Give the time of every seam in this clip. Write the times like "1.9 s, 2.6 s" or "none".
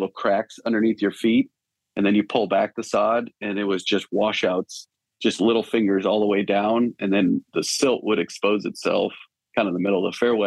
none